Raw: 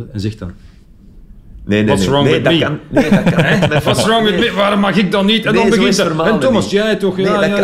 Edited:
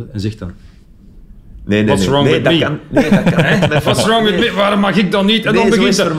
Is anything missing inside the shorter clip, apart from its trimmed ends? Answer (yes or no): no